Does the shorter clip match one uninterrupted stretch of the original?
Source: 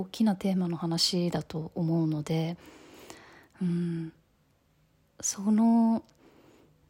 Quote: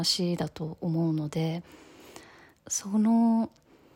no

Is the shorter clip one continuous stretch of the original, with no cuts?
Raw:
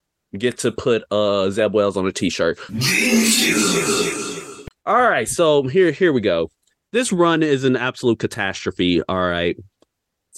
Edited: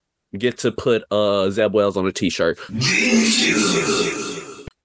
yes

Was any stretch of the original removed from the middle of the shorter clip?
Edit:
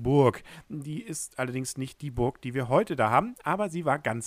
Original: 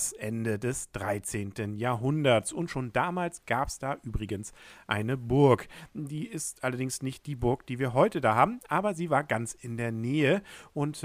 no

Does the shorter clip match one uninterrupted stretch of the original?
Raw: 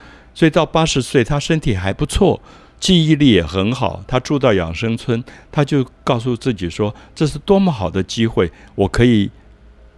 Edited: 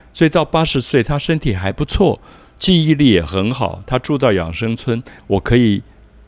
no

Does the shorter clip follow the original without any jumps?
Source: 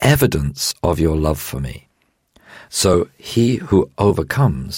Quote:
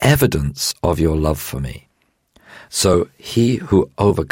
yes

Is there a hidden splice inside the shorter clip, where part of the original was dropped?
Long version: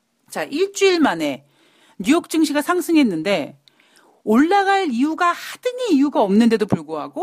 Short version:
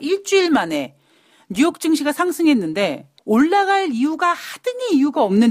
yes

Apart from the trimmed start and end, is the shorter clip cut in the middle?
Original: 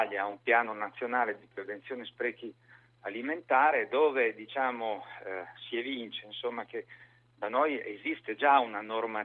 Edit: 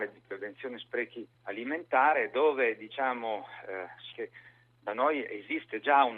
yes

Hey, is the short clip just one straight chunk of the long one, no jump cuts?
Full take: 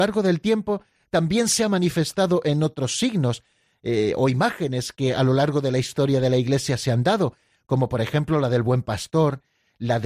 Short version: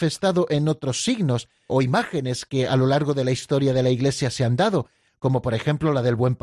no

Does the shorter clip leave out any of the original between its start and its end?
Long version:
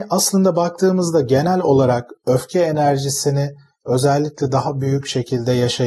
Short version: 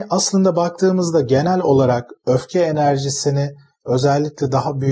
no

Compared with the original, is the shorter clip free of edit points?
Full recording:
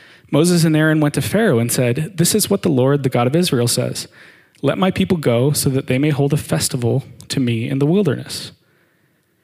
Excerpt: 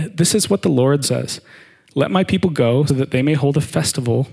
no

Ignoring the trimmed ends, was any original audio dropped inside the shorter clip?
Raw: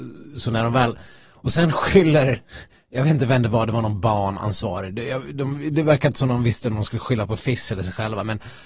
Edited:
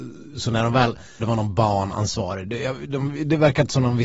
yes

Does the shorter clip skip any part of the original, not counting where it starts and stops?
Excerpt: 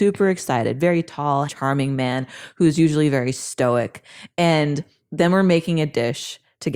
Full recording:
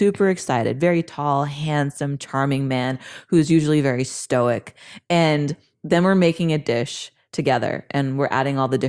yes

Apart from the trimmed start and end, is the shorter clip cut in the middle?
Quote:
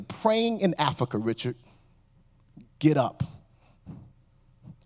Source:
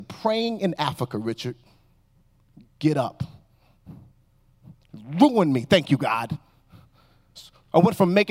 no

